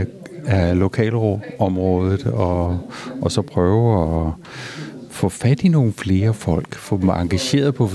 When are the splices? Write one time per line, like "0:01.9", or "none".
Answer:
none